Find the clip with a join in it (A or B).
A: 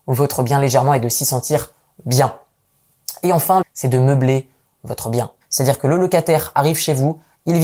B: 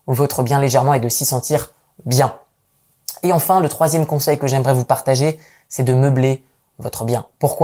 A